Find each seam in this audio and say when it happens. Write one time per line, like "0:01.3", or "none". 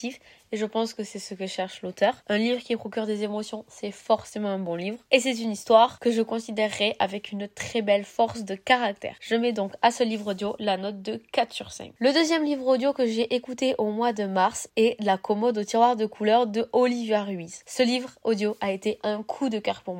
none

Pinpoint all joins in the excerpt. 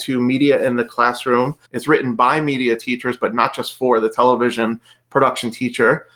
0:01.6

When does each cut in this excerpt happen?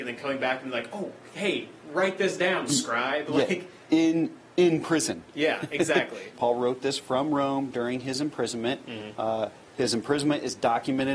0:06.3

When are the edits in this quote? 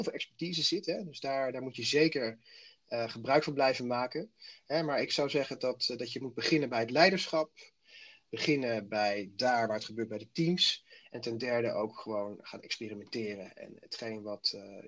none

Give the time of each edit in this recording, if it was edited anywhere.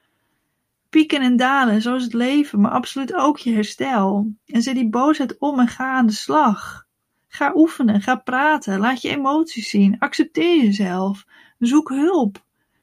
none

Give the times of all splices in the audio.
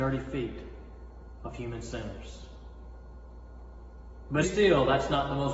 0:04.4

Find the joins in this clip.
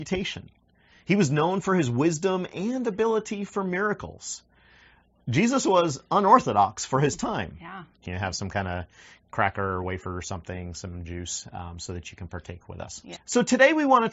0:08.0
0:13.2

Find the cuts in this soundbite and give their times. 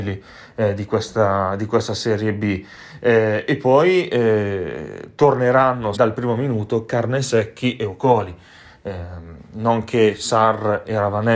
0:06.0

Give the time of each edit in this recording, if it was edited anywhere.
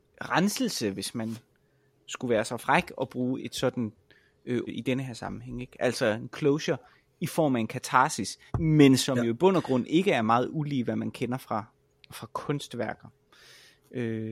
0:03.4
0:04.7
0:08.5

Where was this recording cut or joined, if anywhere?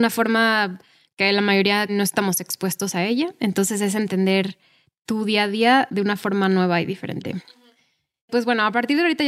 0:01.9

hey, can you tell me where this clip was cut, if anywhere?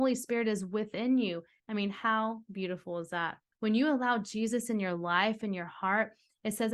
0:01.6
0:03.5

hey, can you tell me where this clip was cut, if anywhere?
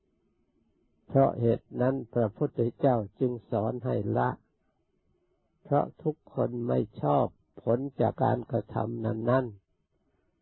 0:08.1

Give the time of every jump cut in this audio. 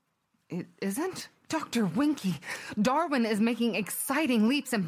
0:01.4

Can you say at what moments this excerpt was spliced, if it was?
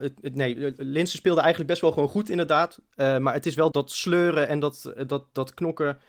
0:03.7

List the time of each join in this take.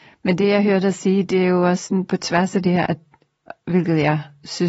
0:02.9

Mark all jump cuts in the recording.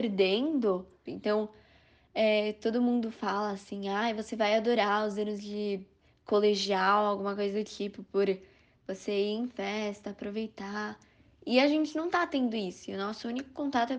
0:01.1

